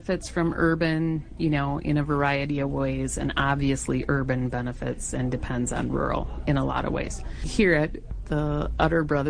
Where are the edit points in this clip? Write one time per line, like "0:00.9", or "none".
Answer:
none